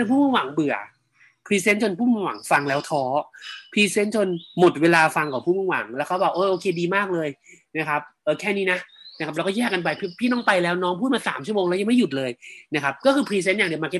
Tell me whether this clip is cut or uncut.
uncut